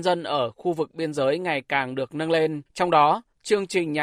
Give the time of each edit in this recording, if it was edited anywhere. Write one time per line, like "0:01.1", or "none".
0:02.7